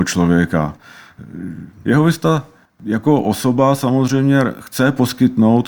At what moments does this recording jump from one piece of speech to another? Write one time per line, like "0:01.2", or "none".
0:01.8